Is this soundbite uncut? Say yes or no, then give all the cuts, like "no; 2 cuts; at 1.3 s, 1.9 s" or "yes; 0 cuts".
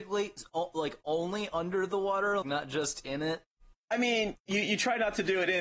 no; 1 cut; at 2.4 s